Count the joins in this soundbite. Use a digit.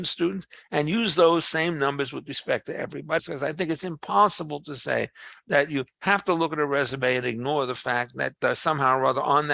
1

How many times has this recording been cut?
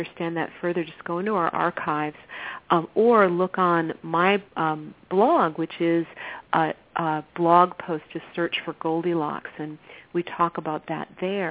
2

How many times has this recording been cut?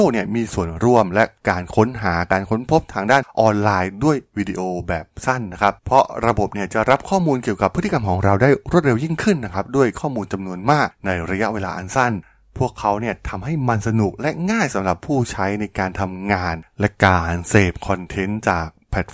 1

